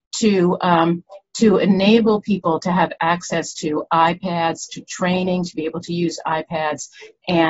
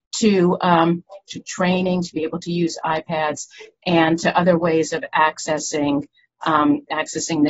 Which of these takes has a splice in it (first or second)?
second